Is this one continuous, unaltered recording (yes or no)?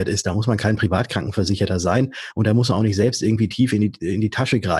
yes